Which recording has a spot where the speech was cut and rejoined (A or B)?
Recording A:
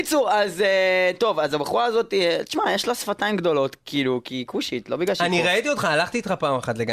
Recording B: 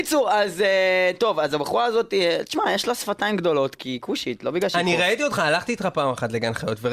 B